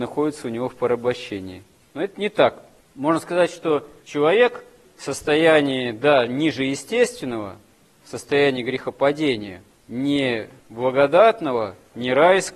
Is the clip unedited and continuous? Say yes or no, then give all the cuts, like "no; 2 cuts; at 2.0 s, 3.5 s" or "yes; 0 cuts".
yes; 0 cuts